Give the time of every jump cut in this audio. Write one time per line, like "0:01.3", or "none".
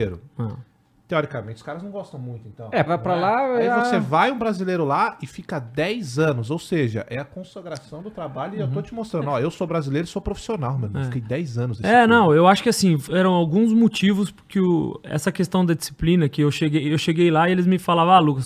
0:02.9
0:13.1